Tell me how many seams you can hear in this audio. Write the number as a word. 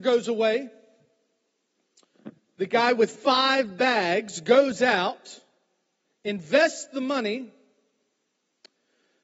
zero